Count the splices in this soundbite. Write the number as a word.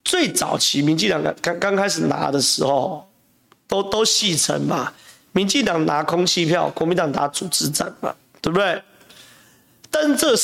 zero